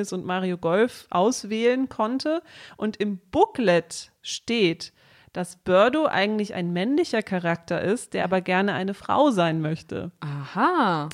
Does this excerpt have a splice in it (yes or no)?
no